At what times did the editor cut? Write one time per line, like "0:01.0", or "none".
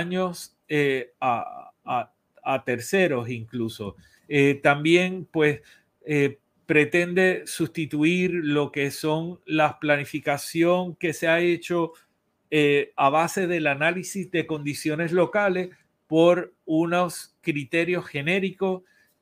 0:04.2